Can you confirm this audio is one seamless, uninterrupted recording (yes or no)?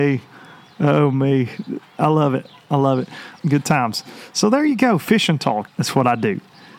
no